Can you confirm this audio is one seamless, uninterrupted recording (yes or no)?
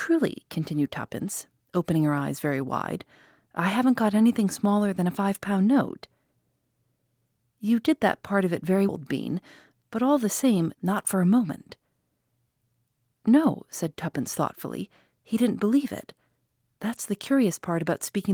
no